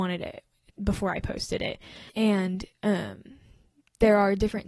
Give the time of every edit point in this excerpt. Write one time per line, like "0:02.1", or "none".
0:02.1